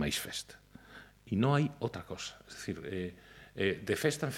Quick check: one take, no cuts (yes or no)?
yes